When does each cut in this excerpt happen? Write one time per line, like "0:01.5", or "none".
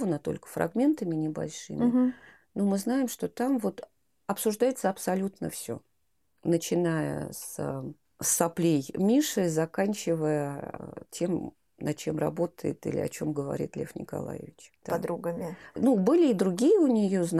0:14.8